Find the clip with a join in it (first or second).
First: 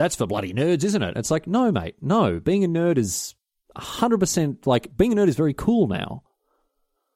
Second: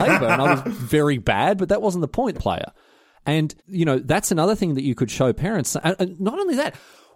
second